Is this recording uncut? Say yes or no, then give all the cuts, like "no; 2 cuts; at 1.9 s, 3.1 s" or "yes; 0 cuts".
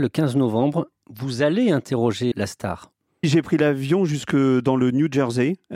no; 1 cut; at 2.3 s